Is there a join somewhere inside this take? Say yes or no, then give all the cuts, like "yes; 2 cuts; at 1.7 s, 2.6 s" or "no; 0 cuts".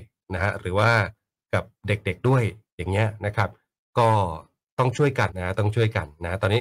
yes; 1 cut; at 5.3 s